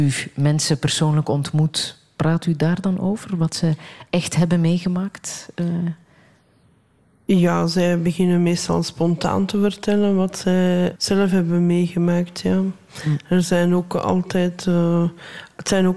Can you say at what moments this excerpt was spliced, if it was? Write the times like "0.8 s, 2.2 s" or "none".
11.0 s